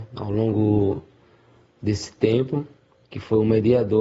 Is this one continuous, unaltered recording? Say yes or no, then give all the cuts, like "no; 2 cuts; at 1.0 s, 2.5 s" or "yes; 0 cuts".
no; 1 cut; at 3.0 s